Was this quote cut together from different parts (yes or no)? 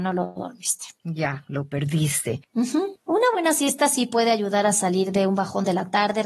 yes